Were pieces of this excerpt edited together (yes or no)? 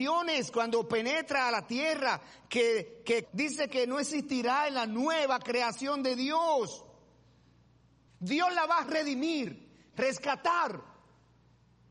yes